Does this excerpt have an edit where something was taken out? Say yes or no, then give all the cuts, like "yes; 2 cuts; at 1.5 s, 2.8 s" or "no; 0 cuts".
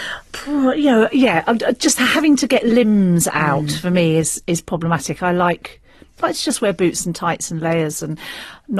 no; 0 cuts